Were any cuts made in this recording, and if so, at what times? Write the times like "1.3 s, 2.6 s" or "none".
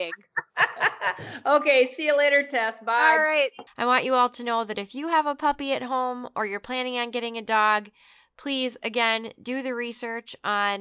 3.7 s